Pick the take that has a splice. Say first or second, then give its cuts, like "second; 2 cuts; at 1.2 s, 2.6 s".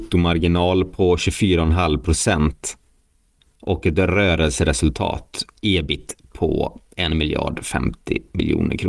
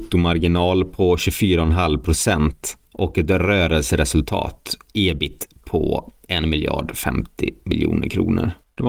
second; 1 cut; at 2.8 s